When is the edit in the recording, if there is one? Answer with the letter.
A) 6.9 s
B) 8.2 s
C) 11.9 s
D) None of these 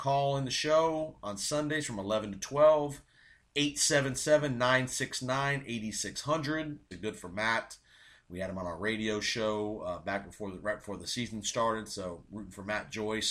A